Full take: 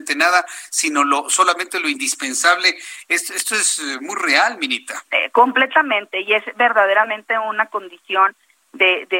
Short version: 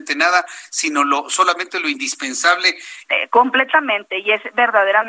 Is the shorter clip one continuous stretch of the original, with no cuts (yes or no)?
no